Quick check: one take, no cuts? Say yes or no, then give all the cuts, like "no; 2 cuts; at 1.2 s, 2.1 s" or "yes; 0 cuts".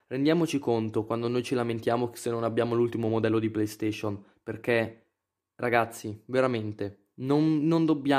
yes; 0 cuts